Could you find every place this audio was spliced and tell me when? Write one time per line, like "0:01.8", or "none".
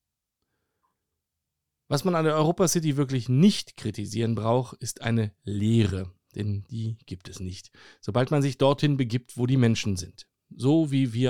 none